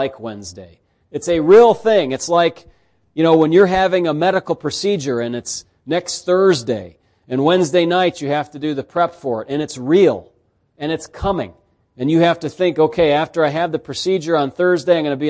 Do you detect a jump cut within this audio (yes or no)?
yes